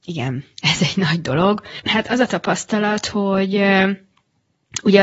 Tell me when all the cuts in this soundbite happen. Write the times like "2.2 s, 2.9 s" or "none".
1.8 s